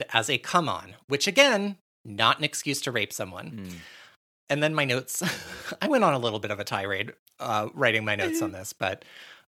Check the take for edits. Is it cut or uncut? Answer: uncut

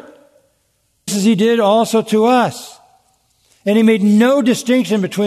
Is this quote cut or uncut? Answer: cut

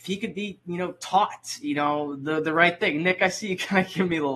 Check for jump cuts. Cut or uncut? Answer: uncut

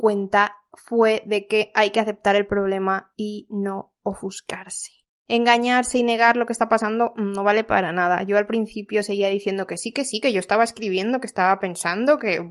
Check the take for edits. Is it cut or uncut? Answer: uncut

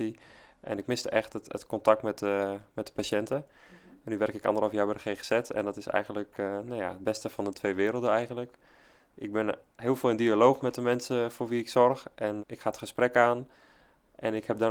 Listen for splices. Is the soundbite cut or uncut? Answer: cut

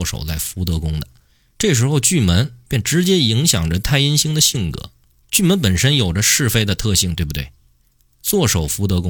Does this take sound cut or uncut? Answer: uncut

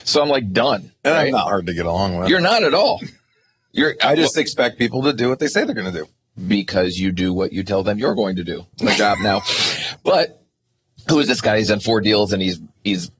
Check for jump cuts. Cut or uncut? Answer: cut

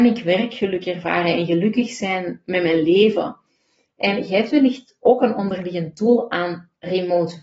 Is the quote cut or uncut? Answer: uncut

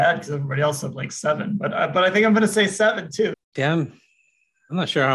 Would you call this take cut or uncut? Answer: cut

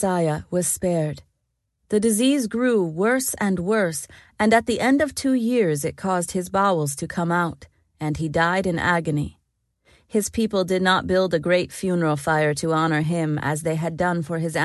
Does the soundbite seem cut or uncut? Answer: cut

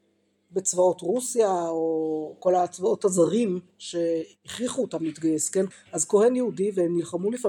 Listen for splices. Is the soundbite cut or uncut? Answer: cut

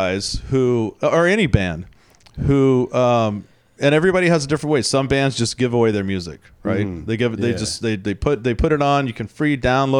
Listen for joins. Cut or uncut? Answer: uncut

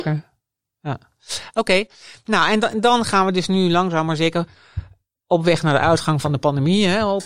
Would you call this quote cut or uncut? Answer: uncut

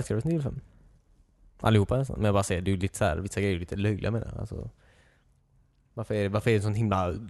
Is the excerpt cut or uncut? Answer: uncut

